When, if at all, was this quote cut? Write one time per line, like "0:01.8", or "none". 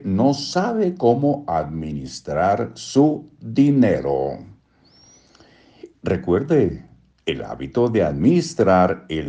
0:05.9